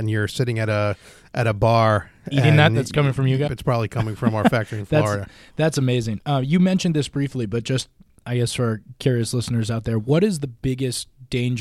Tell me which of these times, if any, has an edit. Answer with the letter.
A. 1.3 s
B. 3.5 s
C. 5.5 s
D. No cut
B